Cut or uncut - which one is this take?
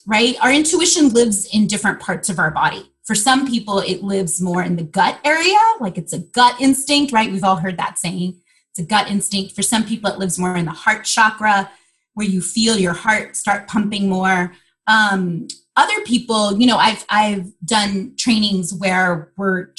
uncut